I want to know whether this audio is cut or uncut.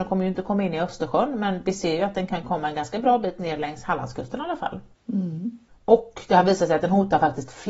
uncut